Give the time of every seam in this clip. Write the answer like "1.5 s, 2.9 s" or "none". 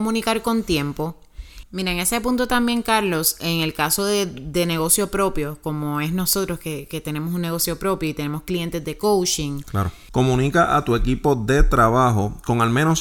1.6 s, 10.1 s